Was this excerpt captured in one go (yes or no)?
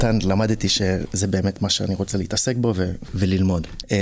yes